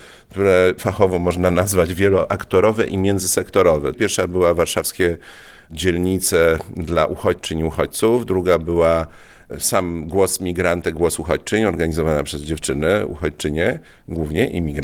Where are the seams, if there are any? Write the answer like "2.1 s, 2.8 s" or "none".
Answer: 3.9 s